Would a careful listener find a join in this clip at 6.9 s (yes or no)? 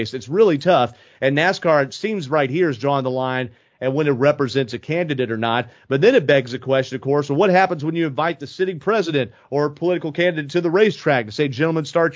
no